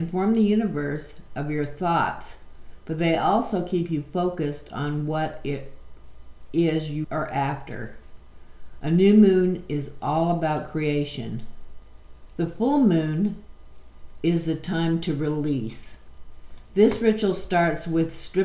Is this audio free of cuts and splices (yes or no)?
no